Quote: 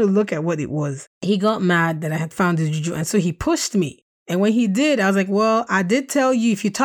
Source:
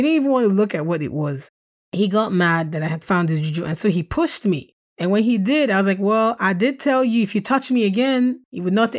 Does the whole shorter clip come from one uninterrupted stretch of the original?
no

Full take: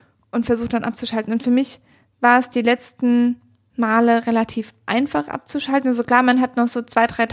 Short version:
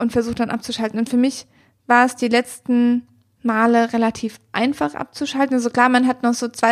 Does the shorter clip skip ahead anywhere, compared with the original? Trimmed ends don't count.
no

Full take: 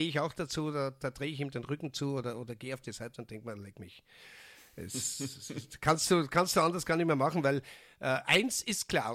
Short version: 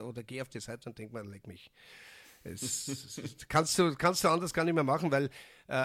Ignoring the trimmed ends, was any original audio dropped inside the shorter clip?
no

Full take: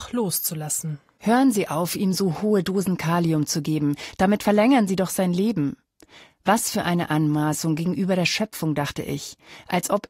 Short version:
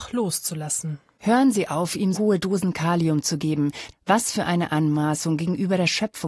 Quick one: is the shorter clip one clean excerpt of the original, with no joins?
no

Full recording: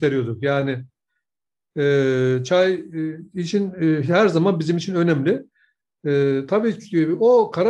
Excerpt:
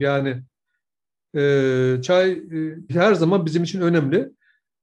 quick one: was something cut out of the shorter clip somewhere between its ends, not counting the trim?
yes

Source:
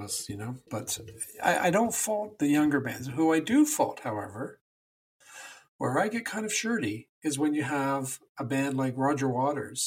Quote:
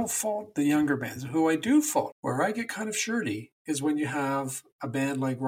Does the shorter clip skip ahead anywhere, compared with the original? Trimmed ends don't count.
yes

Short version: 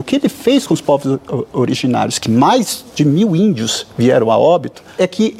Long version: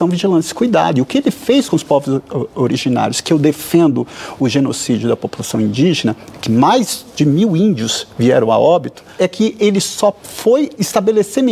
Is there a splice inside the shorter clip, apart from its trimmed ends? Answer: yes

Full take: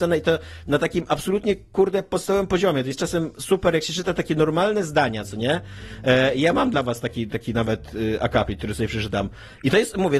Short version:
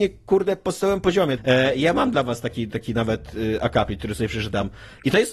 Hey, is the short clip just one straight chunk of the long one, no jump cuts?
no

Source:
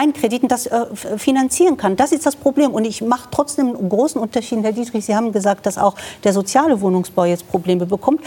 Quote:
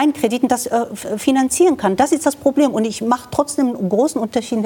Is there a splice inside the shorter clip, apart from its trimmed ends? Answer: no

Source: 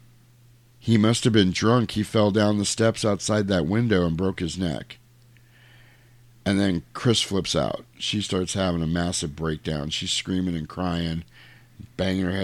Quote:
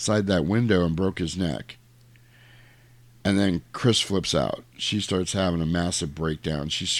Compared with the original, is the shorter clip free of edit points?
yes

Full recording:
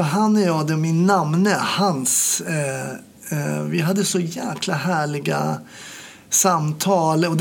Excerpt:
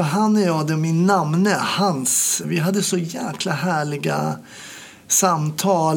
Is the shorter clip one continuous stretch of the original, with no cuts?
no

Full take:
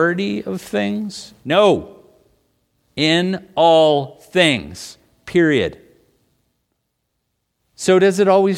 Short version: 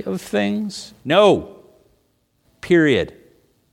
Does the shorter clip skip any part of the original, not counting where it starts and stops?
yes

